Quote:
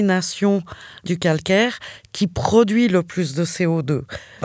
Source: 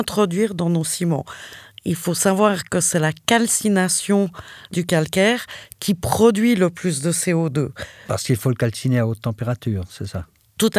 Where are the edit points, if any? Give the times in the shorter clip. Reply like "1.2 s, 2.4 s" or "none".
none